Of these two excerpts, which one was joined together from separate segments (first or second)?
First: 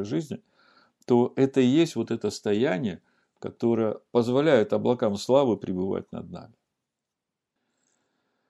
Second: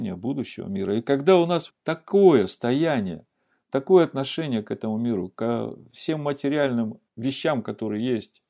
second